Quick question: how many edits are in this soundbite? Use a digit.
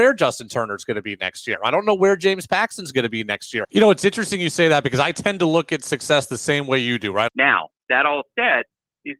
2